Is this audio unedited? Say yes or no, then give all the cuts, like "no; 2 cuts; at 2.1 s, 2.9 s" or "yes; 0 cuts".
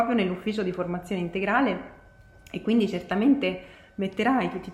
yes; 0 cuts